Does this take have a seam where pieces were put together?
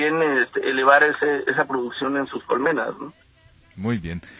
no; 0 cuts

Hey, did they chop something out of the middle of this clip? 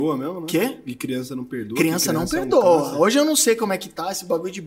no; 0 cuts

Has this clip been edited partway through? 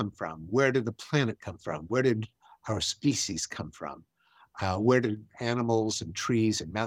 no; 0 cuts

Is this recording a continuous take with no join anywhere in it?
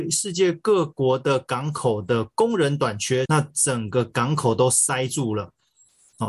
no; 1 cut; at 3.2 s

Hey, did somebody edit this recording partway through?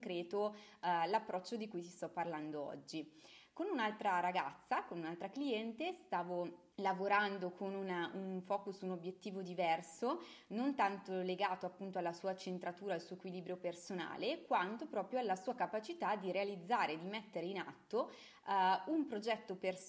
yes; 1 cut; at 6.7 s

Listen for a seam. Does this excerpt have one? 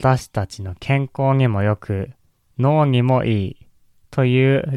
no; 0 cuts

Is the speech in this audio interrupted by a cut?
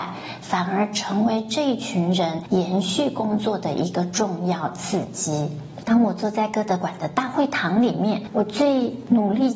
yes; 1 cut; at 5.9 s

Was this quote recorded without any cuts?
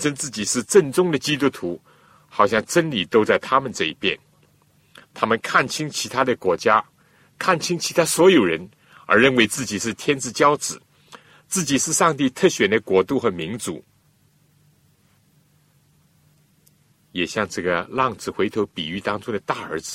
no; 1 cut; at 5.0 s

